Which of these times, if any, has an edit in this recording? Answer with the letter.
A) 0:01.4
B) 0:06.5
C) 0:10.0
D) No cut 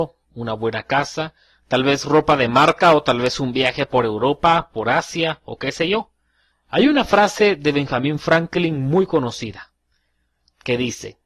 B